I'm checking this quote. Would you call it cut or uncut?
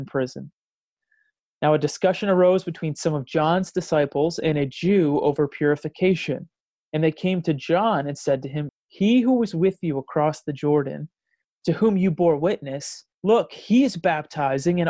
cut